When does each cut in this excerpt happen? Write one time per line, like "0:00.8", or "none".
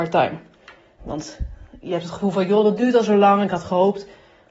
0:01.0